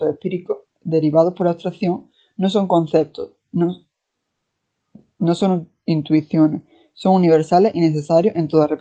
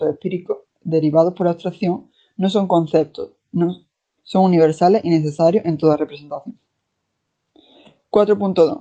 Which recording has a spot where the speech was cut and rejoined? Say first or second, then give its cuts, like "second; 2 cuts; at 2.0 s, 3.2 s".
second; 1 cut; at 4.2 s